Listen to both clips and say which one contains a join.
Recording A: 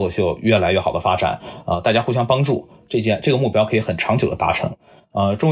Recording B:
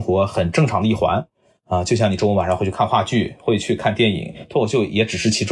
B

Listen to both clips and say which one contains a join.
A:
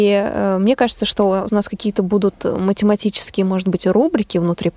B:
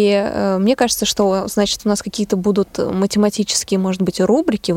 A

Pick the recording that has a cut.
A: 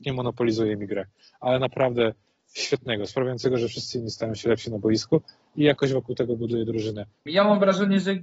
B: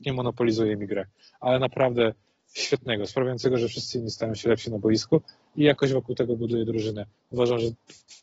A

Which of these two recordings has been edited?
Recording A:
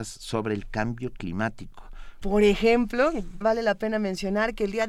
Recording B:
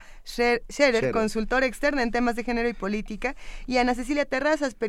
A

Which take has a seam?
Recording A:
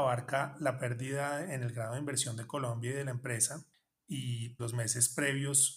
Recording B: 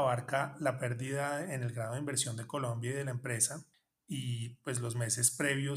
A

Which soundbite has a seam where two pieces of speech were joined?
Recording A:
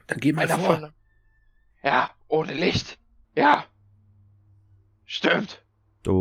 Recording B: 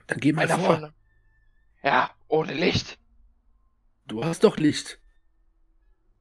A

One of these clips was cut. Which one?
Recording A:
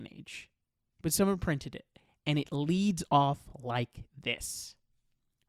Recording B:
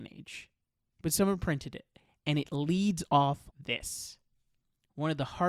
B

